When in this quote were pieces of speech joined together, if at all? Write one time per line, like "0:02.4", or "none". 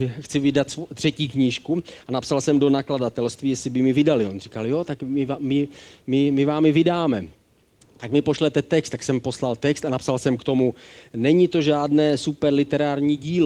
none